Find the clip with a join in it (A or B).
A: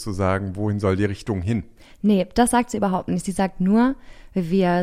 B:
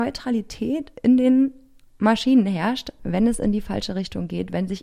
B